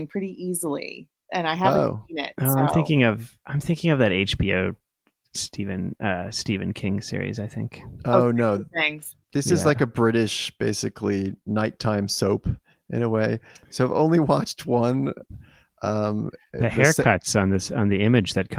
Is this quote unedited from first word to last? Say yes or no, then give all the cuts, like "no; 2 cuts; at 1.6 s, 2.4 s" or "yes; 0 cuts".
no; 1 cut; at 9.2 s